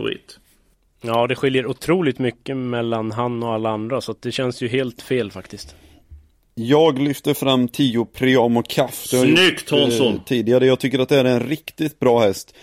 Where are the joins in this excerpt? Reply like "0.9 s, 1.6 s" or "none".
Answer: none